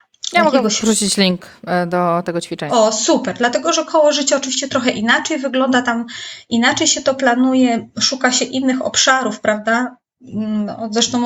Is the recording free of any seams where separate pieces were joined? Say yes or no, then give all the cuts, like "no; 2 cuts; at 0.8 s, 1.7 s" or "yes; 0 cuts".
no; 2 cuts; at 2.7 s, 7.9 s